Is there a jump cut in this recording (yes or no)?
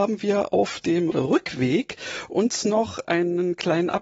yes